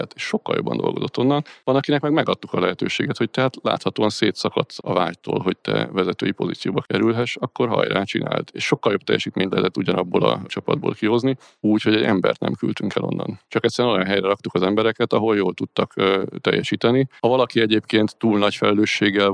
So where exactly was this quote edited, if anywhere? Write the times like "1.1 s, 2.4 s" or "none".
4.8 s, 11.6 s